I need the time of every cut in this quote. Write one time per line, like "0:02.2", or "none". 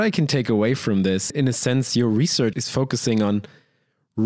0:01.3
0:02.5